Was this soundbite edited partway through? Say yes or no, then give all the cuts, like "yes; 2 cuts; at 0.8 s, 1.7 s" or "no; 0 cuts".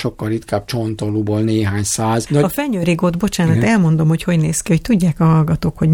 yes; 1 cut; at 2.3 s